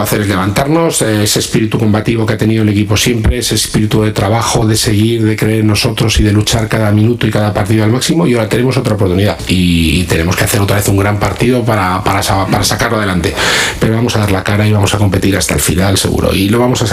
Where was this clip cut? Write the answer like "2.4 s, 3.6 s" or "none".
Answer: none